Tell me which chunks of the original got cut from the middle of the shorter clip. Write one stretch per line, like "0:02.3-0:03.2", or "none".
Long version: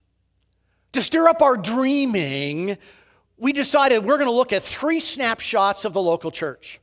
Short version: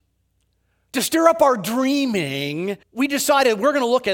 0:02.8-0:03.3

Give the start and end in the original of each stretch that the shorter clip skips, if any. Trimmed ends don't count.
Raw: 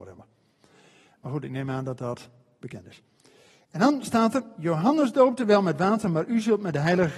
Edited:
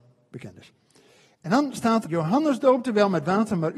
0:04.3-0:04.6

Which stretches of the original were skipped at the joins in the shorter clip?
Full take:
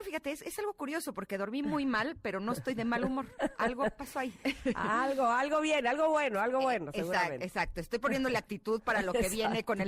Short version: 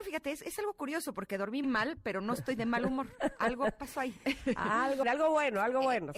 0:01.6-0:01.8
0:05.2-0:05.8

